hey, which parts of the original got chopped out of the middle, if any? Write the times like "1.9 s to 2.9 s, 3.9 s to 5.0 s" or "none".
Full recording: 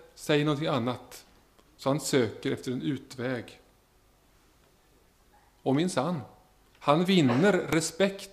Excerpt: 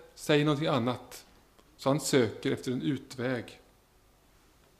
none